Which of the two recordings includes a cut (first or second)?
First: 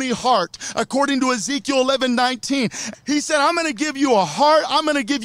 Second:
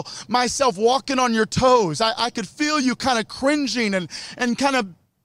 first